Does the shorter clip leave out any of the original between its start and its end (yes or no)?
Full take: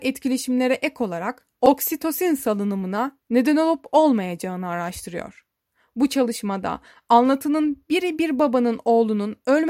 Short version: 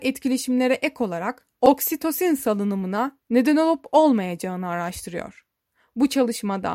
no